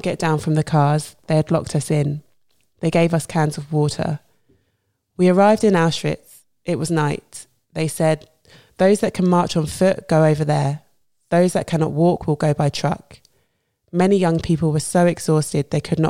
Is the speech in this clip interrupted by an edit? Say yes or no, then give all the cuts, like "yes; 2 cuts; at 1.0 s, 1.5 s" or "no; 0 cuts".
no; 0 cuts